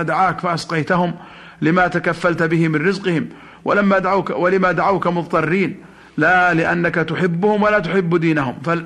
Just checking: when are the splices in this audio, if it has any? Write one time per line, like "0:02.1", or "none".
none